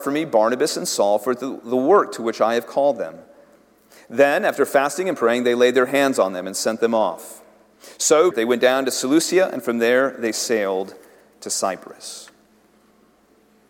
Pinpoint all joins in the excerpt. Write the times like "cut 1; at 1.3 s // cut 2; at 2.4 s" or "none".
cut 1; at 8.3 s